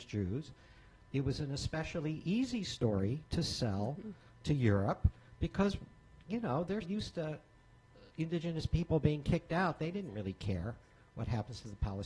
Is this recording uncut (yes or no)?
no